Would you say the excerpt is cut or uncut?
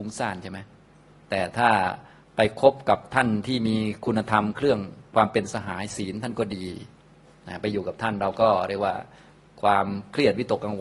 uncut